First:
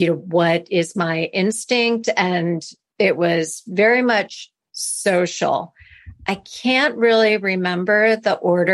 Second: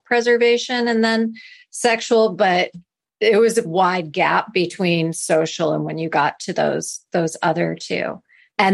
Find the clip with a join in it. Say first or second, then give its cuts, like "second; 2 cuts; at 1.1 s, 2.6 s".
second; 1 cut; at 3.6 s